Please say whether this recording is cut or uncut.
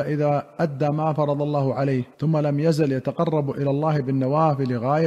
cut